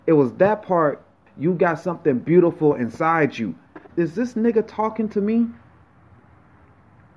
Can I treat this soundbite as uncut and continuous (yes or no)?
no